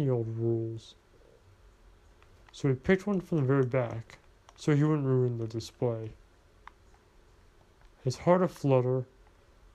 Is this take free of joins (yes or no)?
yes